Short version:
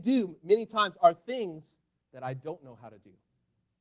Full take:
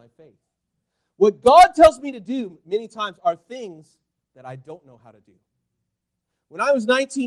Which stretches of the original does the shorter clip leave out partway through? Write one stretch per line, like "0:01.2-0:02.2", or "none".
none